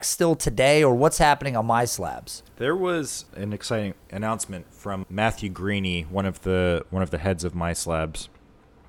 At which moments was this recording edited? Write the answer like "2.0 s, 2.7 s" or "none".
2.5 s, 5.0 s

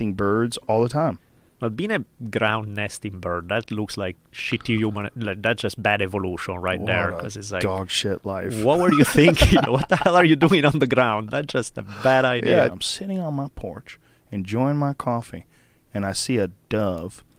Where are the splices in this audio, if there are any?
9.6 s, 12.7 s

